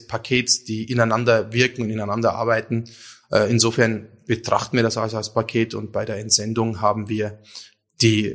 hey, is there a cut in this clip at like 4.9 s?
no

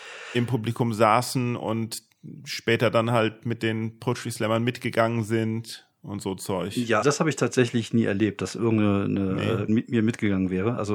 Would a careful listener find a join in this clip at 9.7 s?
yes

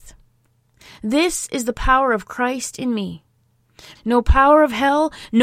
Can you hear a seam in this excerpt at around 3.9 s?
yes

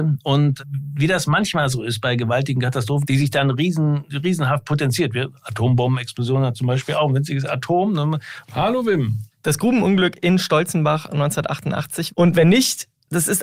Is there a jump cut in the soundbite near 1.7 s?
no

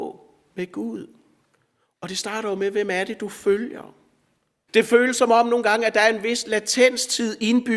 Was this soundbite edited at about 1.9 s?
no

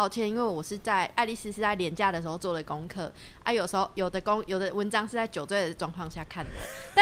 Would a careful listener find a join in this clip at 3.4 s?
no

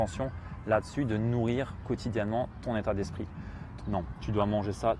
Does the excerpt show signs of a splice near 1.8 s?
no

